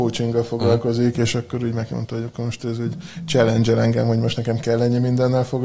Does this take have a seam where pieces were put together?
no; 0 cuts

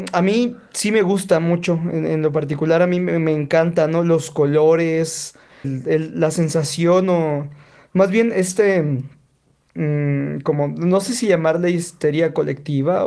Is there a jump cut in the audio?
yes; 1 cut; at 5.6 s

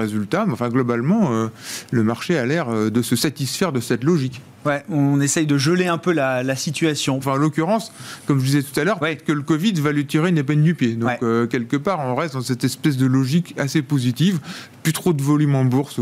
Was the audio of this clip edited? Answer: yes; 1 cut; at 7.2 s

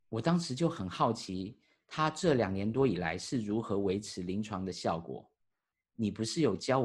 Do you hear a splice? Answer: yes; 1 cut; at 5.7 s

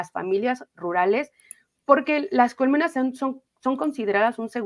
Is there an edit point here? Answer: no; 0 cuts

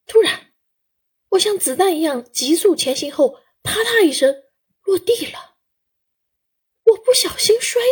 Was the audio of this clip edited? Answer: no; 0 cuts

